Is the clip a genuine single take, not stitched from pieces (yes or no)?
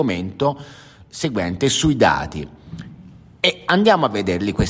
yes